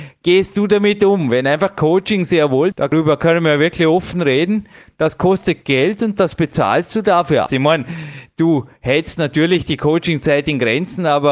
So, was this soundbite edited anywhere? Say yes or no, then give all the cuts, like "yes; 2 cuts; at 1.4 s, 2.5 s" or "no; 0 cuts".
yes; 2 cuts; at 2.7 s, 7.5 s